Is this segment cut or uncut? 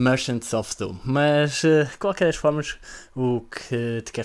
uncut